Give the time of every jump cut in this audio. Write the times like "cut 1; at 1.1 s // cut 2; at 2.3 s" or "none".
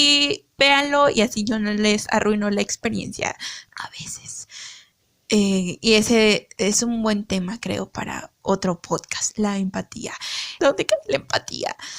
cut 1; at 3.7 s // cut 2; at 10.6 s

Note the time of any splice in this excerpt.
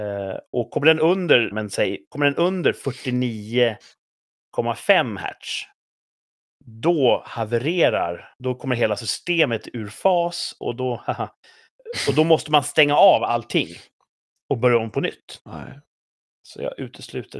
cut 1; at 1.5 s // cut 2; at 15.4 s

